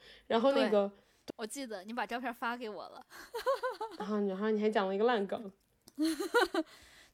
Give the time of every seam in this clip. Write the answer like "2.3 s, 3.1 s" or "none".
1.3 s